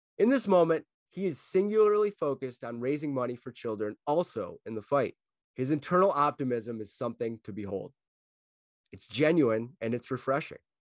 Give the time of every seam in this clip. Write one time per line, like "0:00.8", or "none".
0:00.9
0:05.4